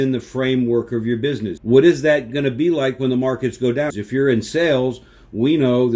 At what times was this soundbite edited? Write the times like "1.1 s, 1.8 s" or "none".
1.6 s, 3.9 s